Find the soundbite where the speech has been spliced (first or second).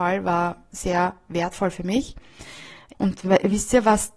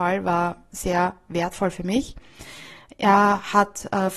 first